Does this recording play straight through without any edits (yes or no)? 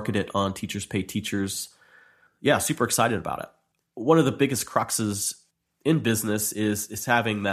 yes